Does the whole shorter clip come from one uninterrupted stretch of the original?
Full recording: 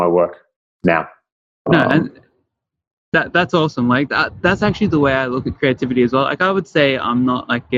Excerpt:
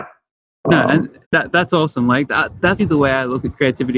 no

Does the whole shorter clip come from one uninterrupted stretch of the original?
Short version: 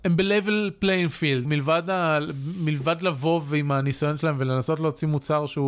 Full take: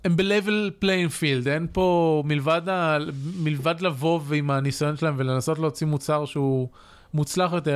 no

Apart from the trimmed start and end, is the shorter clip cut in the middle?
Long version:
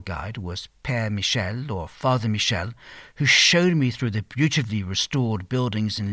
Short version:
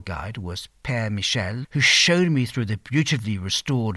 yes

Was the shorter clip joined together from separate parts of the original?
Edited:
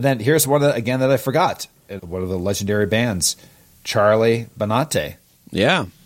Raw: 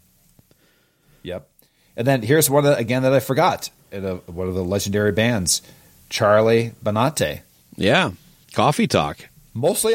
yes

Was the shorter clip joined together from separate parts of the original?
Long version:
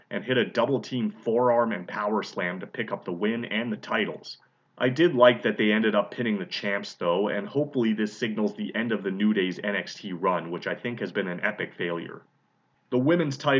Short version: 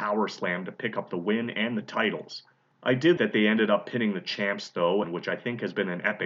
yes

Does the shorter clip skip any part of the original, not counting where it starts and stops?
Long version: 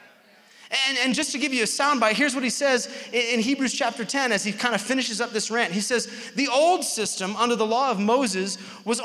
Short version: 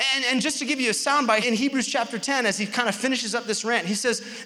yes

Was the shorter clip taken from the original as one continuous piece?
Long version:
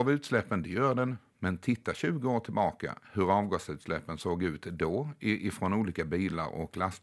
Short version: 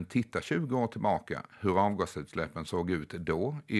yes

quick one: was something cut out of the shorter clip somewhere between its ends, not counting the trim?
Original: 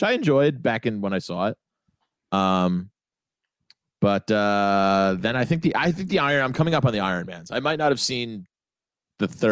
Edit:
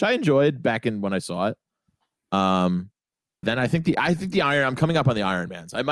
yes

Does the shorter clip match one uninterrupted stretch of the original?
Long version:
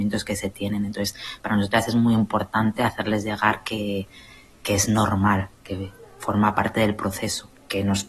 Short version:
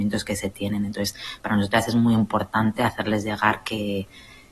yes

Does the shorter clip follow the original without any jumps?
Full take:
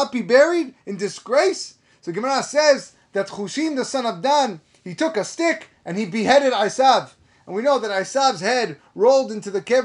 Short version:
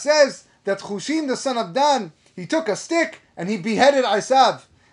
yes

